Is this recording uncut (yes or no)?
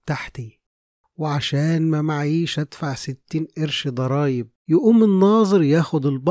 no